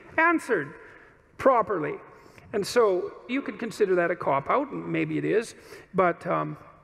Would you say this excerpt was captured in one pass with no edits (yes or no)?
no